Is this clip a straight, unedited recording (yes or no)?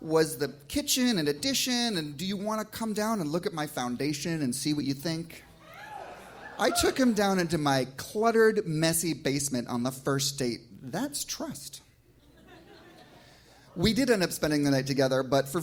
yes